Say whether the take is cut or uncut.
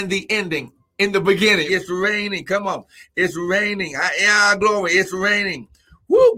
cut